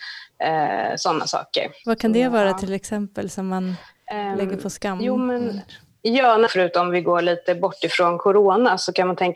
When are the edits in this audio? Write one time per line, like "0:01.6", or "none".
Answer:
0:01.8
0:06.5